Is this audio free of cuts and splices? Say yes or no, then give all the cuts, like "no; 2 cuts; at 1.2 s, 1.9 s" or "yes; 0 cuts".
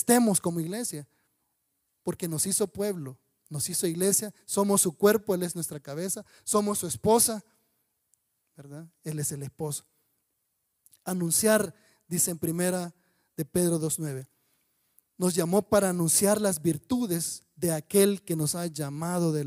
yes; 0 cuts